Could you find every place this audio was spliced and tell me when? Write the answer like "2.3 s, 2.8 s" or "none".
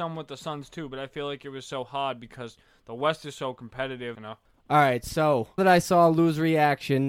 4.1 s, 5.6 s

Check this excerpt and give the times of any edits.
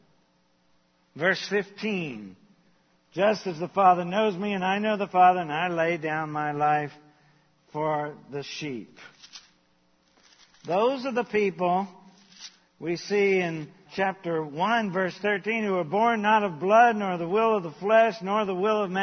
13.9 s

